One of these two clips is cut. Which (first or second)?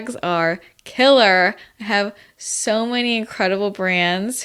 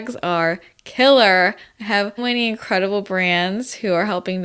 second